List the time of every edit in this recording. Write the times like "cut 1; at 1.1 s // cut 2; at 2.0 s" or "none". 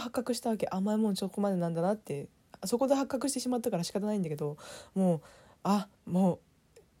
cut 1; at 5.9 s